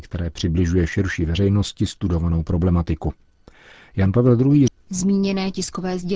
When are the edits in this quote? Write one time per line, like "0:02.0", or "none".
0:04.7